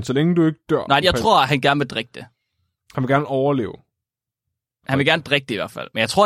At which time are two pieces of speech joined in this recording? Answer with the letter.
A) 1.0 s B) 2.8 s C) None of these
A